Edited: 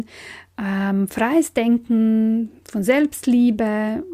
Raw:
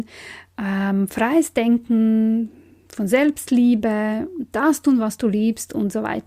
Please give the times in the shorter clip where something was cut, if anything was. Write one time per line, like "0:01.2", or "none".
0:02.6